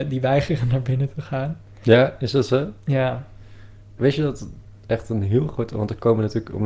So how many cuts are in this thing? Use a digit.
1